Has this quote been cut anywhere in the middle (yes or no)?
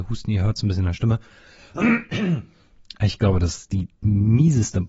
no